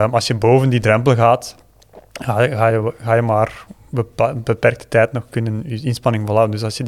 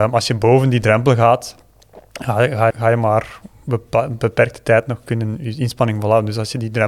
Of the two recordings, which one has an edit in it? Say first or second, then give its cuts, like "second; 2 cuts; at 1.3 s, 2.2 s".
second; 1 cut; at 2.7 s